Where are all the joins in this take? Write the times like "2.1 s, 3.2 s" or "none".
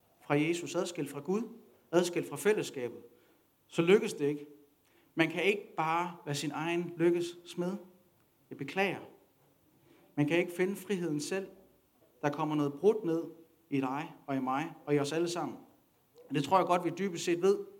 12.0 s

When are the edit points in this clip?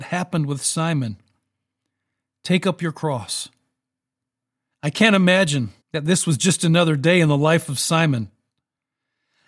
4.7 s, 5.8 s

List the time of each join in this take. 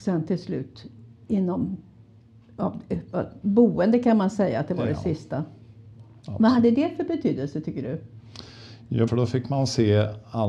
9.1 s

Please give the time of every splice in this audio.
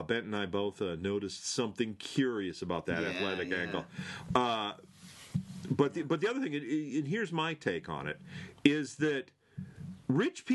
none

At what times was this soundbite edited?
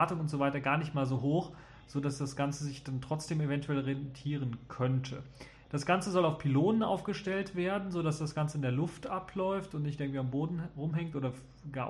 none

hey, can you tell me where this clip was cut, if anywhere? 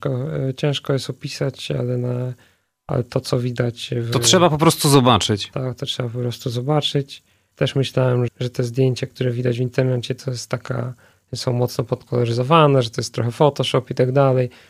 8.3 s

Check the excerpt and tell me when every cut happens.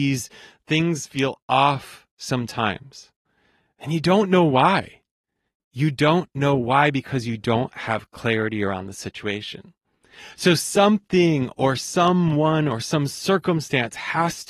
none

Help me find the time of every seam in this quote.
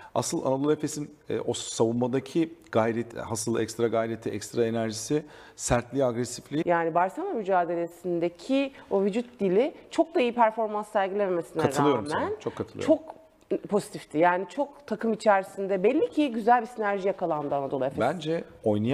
3.1 s, 6.6 s

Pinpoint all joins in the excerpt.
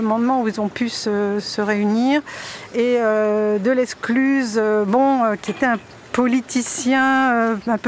5.5 s

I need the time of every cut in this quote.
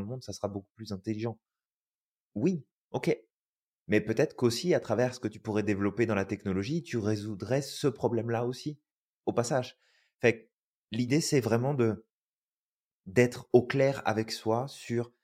none

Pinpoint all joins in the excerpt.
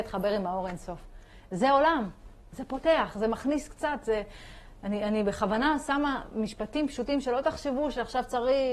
none

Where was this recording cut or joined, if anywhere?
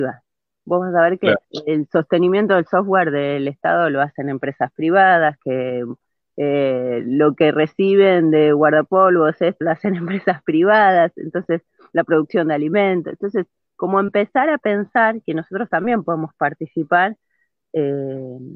1.4 s, 9.6 s

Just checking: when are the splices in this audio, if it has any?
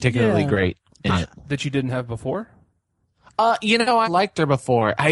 4.0 s

